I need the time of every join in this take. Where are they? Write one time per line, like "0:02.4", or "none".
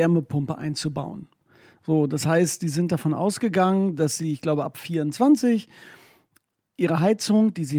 none